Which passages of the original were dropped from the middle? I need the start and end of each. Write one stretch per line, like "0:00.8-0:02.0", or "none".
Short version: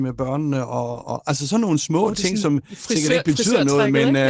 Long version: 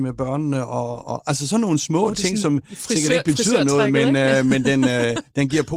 none